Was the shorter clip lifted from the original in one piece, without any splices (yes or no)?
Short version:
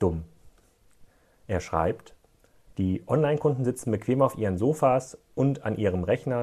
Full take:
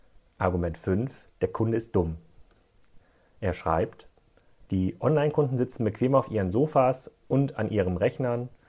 yes